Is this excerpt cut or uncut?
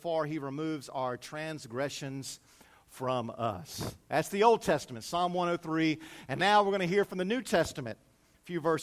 uncut